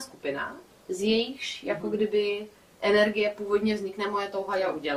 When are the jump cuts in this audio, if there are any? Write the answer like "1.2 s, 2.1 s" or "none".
none